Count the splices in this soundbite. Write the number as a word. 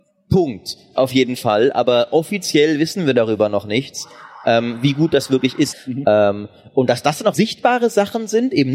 two